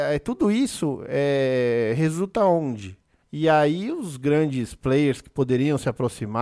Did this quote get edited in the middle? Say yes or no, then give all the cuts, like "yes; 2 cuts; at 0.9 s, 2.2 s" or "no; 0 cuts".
yes; 1 cut; at 3.2 s